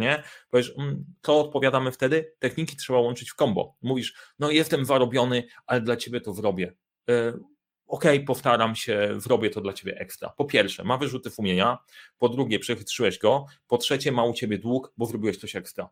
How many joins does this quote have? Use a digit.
0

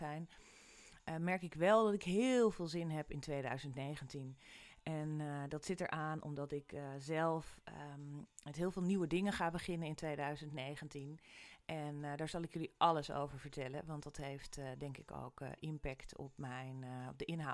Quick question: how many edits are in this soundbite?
0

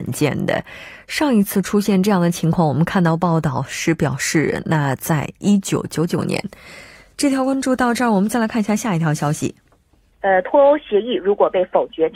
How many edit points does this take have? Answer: 1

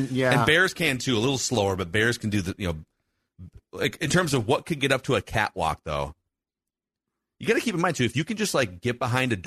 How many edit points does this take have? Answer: 0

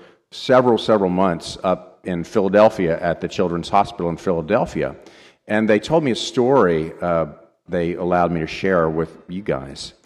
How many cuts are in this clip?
1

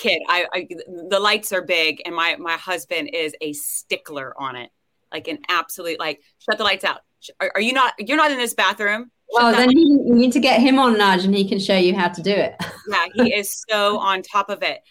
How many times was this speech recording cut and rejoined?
0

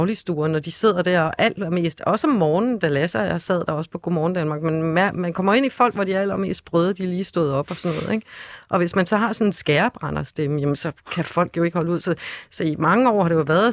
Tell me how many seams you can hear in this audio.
0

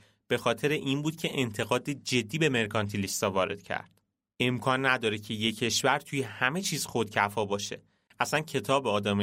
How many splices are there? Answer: 2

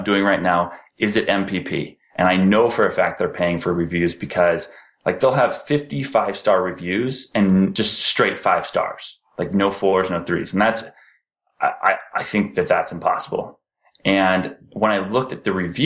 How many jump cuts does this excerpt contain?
1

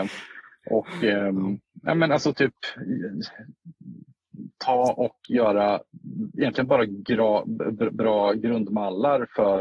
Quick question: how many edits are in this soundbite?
0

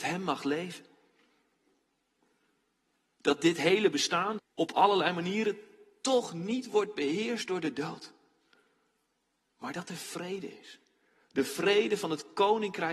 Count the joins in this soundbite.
1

